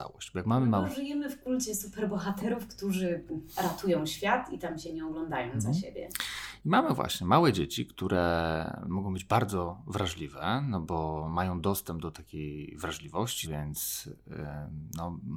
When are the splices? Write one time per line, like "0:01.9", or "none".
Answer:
0:13.4